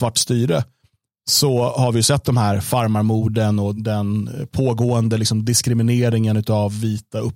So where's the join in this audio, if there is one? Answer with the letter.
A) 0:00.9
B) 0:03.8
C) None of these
B